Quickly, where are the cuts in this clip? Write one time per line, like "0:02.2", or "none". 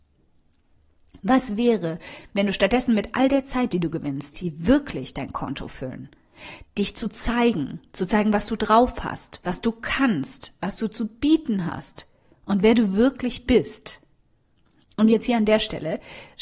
0:04.3
0:06.7